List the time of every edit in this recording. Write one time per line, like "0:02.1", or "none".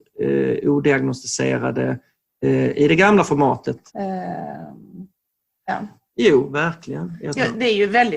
0:03.9
0:06.1